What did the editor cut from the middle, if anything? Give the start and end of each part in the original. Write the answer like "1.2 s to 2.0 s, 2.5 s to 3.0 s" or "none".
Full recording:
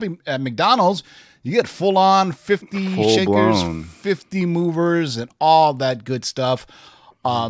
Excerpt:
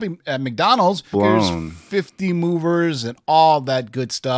1.1 s to 3.3 s